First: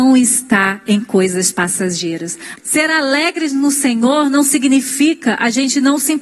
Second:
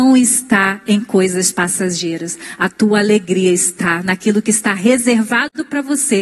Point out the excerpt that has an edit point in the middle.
first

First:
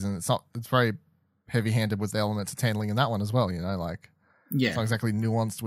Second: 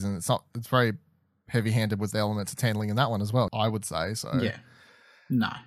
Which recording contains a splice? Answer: second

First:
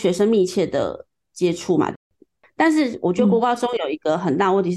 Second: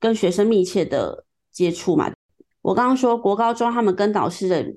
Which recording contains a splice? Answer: second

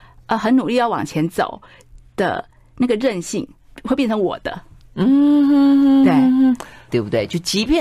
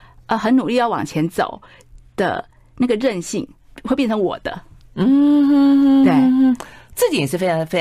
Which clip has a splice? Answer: first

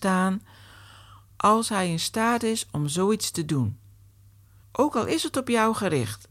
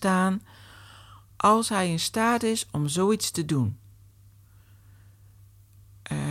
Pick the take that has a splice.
first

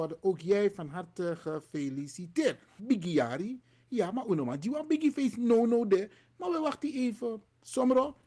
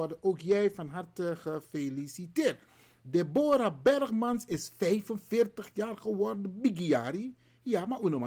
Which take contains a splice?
first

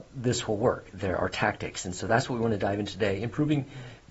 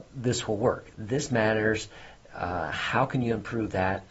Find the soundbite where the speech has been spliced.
second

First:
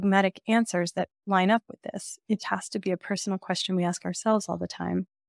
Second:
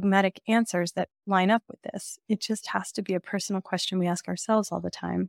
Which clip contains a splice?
first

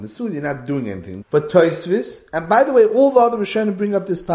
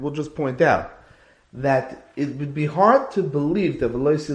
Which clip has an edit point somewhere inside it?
first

